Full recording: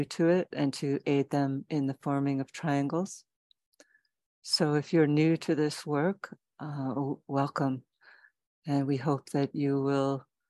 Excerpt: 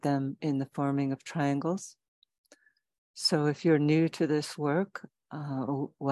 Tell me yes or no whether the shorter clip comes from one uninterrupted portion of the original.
yes